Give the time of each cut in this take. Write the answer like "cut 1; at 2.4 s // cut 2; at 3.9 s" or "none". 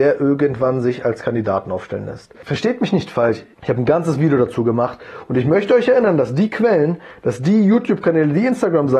cut 1; at 3.5 s